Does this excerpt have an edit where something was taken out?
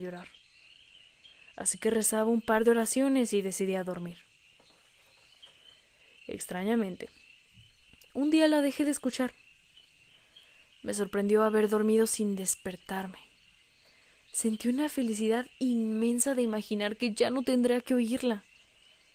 no; 0 cuts

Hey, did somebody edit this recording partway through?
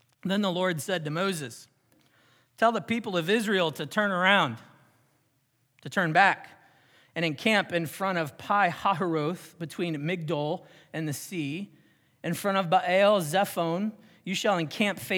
no; 0 cuts

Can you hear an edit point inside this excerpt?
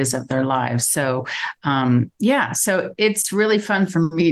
no; 0 cuts

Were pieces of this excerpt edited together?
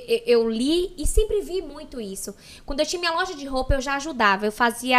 no; 0 cuts

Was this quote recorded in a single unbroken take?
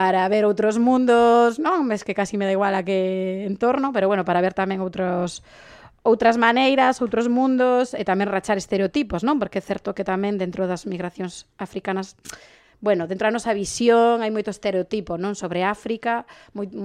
yes; 0 cuts

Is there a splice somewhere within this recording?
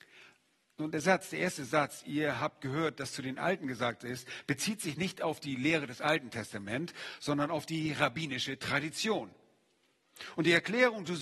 no; 0 cuts

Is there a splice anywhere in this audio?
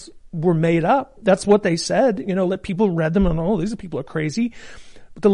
no; 0 cuts

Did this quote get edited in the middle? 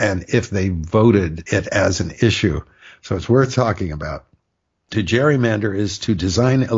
no; 0 cuts

